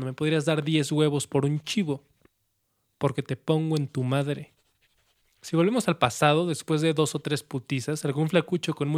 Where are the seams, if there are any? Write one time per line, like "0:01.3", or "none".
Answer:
none